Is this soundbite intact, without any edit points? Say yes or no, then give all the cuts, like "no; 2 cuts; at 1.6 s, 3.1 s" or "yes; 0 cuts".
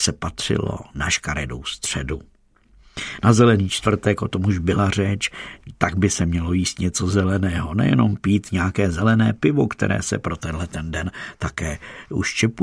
yes; 0 cuts